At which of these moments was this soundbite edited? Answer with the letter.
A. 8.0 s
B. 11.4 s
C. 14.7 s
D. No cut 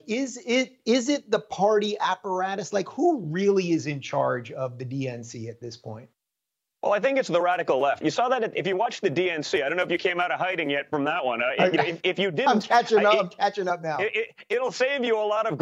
A